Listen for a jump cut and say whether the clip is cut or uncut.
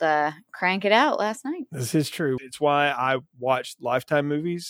cut